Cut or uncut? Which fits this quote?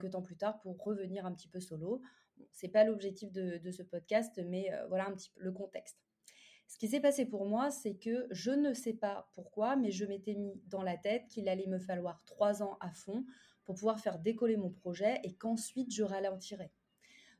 cut